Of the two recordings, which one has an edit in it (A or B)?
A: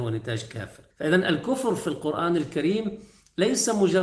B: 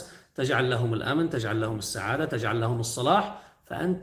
A